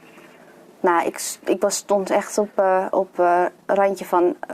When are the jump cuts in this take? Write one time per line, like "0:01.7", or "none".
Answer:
none